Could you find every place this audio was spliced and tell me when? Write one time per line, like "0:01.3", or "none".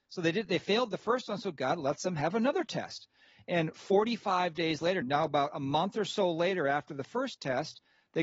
0:05.0